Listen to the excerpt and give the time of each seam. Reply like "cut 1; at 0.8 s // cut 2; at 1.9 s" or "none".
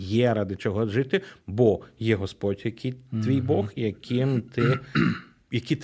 cut 1; at 3.8 s